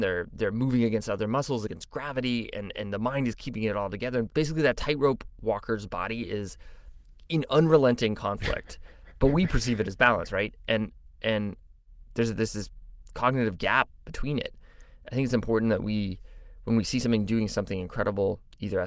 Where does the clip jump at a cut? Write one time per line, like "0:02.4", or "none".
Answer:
none